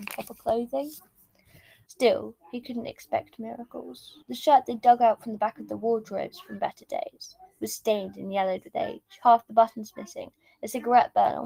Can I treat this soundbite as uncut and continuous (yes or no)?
no